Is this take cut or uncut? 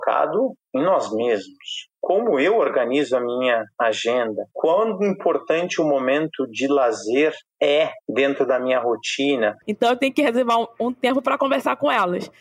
cut